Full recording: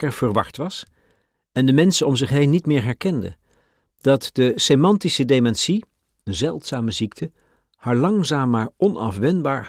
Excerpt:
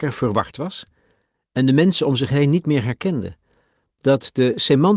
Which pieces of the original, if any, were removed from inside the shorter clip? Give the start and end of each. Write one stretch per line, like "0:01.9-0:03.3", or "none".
none

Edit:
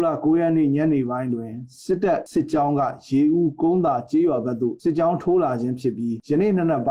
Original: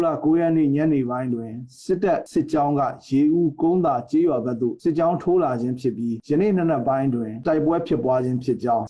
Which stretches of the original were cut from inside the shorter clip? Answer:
none

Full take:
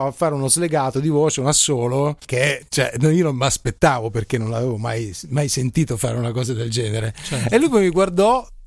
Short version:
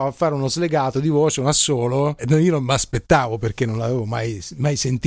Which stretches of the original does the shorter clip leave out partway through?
0:02.2-0:02.9

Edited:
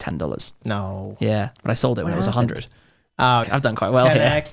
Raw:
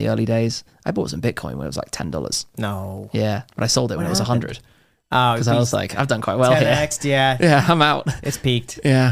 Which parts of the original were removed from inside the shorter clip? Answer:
0:05.4-0:05.9

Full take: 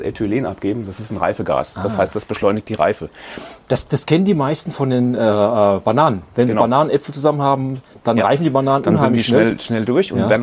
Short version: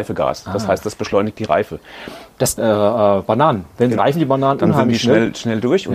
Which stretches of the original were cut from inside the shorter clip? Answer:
0:03.9-0:05.2
0:06.6-0:08.2

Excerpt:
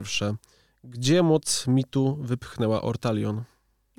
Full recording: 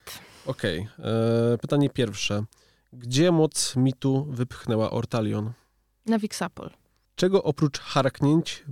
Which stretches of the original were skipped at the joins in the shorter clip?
none

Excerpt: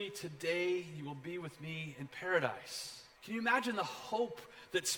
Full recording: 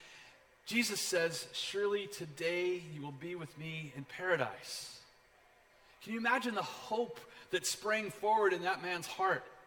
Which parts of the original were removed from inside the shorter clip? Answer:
0:05.1-0:05.9

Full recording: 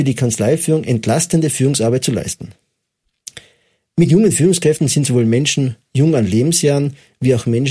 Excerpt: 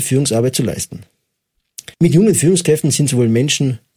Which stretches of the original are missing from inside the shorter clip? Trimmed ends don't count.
0:03.4-0:03.9

